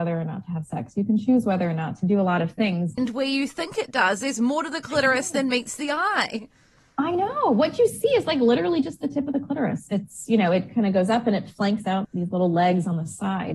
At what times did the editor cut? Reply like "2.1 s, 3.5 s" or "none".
3.0 s, 12.0 s